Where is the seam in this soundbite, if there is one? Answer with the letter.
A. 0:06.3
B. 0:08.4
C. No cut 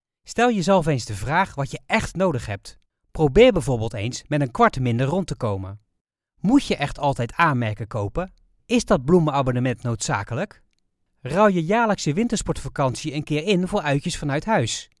C